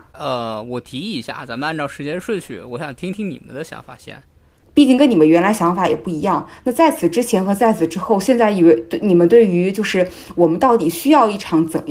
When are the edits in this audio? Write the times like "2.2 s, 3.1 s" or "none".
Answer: 4.6 s